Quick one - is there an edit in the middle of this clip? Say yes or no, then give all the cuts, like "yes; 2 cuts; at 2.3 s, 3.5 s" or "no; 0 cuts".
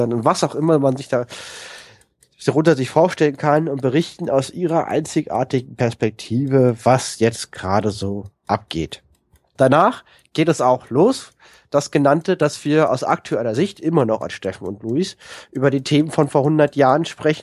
yes; 1 cut; at 9.6 s